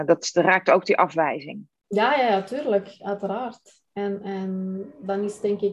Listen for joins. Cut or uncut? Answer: uncut